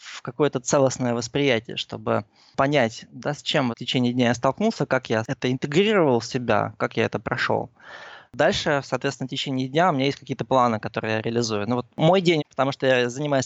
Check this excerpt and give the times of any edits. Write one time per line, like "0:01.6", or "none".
0:03.7
0:08.3
0:12.4